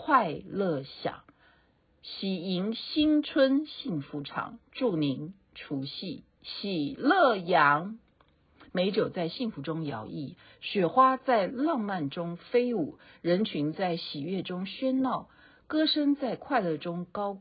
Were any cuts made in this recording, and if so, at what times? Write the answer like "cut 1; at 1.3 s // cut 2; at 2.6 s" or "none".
none